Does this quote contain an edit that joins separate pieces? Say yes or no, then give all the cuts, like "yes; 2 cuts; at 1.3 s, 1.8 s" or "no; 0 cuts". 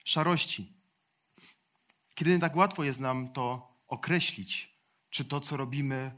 no; 0 cuts